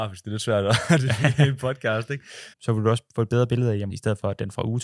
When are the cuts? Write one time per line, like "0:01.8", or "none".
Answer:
0:02.5
0:03.9